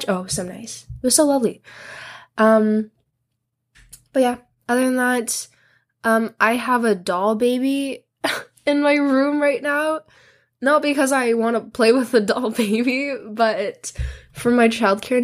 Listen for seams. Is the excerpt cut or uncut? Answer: uncut